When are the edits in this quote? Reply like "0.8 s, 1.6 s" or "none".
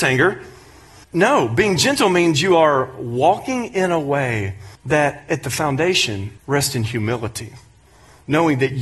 1.0 s, 4.8 s, 6.4 s